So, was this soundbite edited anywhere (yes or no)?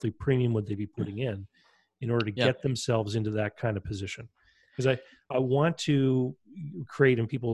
yes